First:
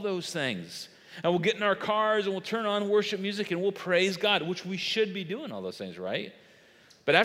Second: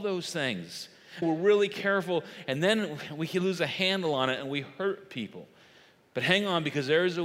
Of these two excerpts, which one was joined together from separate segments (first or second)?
second